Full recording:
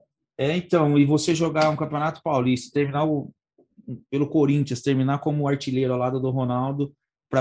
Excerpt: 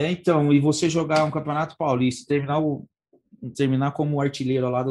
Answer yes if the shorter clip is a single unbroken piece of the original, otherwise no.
no